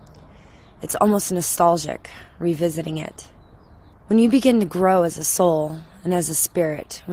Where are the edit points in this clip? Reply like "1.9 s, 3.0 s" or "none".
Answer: 3.9 s